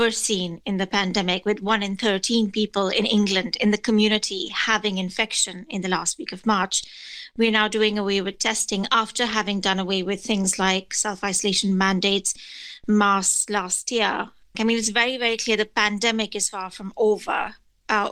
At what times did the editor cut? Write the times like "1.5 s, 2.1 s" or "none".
14.5 s